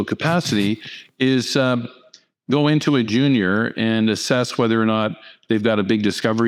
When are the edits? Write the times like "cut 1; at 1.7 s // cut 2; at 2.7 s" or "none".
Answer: none